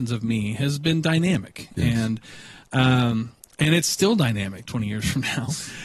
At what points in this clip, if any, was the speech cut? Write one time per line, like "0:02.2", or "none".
0:04.6